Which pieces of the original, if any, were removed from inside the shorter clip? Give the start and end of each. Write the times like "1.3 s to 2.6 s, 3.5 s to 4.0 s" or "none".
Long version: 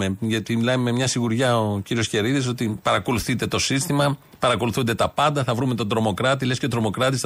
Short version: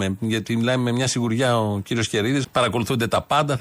2.4 s to 4.3 s